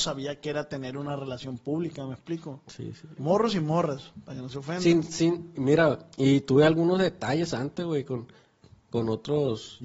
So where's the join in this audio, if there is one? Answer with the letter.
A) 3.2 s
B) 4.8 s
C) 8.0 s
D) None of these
A